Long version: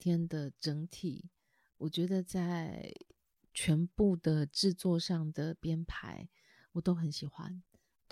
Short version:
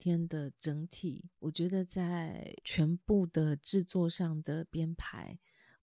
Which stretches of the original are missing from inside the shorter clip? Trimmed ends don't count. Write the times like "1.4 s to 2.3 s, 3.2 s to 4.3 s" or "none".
1.3 s to 1.7 s, 3.0 s to 3.5 s